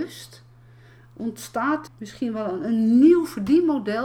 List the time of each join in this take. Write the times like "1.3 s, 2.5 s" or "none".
1.9 s